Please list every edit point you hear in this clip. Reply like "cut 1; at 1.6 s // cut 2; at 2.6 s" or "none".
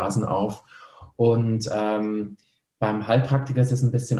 none